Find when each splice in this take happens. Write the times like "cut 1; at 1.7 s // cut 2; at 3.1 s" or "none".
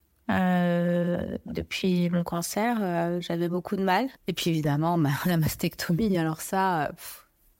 cut 1; at 4.2 s